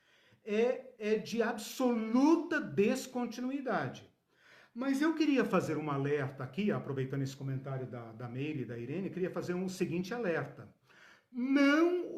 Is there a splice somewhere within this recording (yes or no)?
no